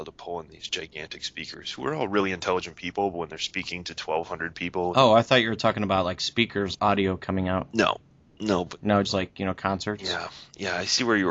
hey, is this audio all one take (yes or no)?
no